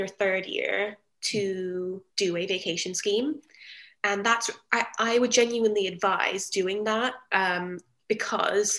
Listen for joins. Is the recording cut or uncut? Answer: cut